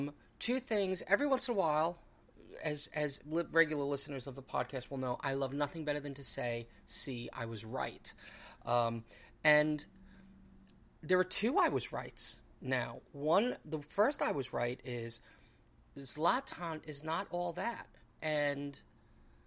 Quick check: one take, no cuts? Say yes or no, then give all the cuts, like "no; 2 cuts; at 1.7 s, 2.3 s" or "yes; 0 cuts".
yes; 0 cuts